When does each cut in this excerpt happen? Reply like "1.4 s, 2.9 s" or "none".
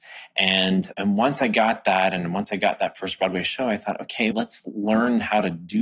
0.9 s, 4.3 s